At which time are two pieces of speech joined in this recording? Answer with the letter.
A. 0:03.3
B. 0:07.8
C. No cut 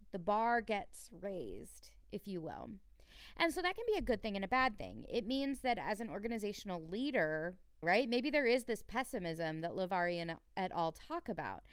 B